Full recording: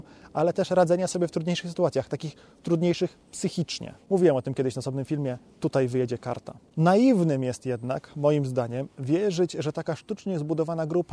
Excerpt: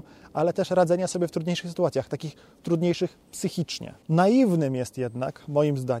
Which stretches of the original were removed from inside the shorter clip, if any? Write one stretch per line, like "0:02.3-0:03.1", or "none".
0:04.0-0:06.7